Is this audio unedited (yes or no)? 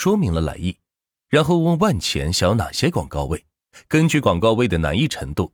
yes